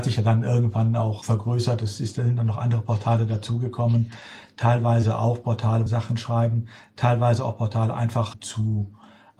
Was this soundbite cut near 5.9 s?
yes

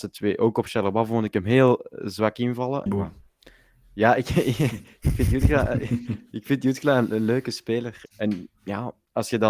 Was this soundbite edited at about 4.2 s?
no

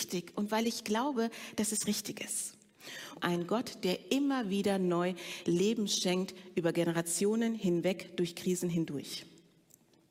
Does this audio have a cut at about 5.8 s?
no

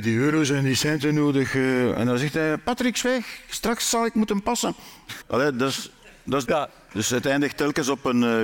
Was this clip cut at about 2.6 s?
no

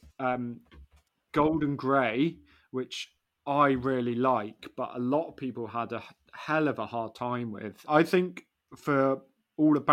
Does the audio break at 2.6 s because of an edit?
no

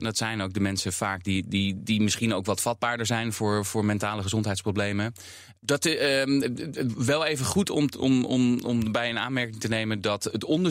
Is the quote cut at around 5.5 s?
yes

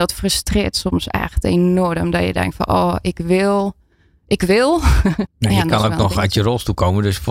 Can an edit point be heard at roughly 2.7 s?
no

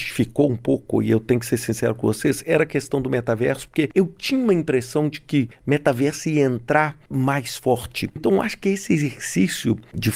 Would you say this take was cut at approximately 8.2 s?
yes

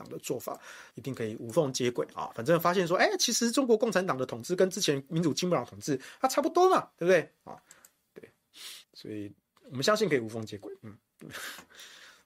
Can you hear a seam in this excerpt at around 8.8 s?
yes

